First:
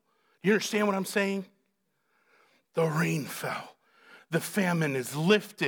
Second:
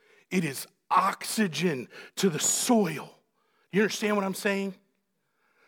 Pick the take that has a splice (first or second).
first